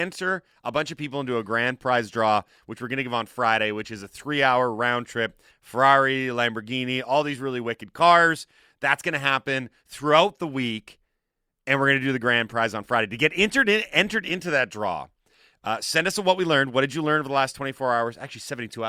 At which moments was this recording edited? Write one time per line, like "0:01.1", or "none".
0:05.5